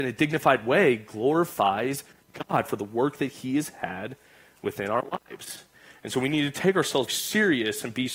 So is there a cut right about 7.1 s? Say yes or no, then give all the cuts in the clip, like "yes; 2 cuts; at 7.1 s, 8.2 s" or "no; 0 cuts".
yes; 1 cut; at 7.1 s